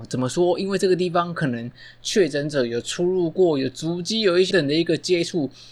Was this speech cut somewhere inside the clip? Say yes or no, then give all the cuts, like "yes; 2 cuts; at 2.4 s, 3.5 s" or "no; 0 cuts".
yes; 1 cut; at 4.5 s